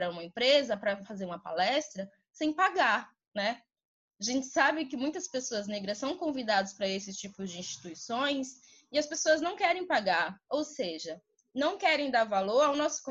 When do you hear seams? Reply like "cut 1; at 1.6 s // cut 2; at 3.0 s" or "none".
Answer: none